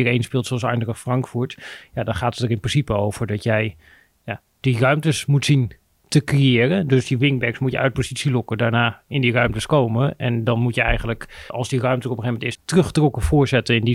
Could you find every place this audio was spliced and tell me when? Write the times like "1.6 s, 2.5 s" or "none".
11.5 s, 12.5 s